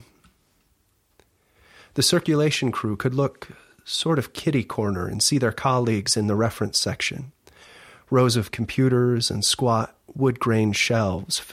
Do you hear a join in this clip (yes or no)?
no